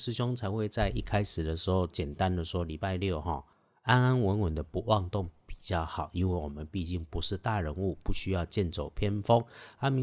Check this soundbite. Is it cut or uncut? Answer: uncut